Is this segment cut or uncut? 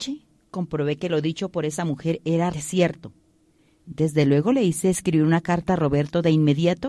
cut